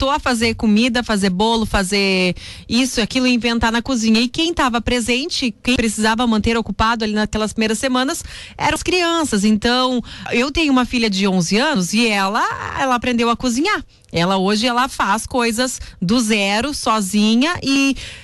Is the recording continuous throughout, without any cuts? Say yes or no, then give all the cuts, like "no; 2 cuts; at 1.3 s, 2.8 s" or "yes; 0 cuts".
yes; 0 cuts